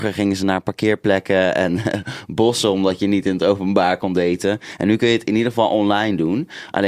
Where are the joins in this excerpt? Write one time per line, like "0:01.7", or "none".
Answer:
none